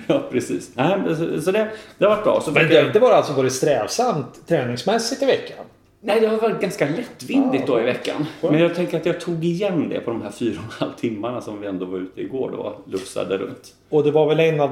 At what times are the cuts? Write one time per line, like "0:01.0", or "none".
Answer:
none